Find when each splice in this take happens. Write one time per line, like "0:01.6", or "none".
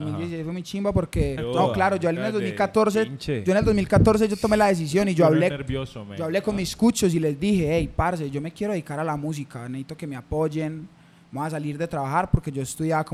0:01.4